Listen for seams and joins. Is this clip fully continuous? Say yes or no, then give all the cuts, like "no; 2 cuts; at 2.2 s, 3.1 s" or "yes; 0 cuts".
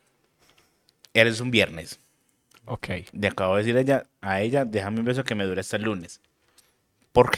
yes; 0 cuts